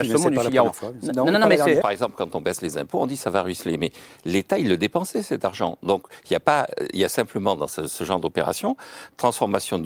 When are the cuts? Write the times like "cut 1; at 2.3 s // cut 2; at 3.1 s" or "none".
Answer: cut 1; at 1.8 s